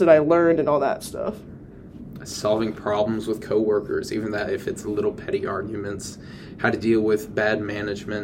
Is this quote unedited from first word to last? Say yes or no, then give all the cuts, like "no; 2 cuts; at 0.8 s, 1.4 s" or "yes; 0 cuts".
no; 1 cut; at 2.2 s